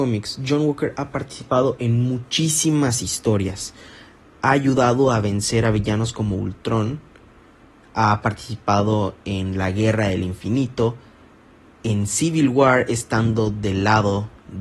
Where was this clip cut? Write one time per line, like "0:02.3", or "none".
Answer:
none